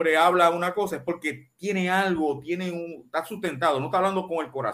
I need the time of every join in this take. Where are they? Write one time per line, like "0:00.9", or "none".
none